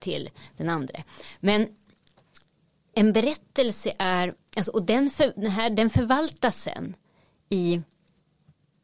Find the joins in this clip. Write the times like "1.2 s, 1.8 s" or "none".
none